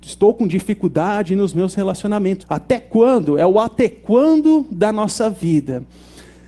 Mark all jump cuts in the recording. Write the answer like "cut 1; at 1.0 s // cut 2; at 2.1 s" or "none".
cut 1; at 2.4 s